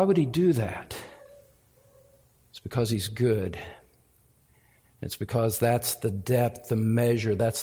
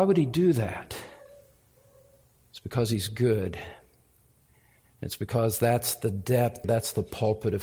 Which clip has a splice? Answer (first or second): second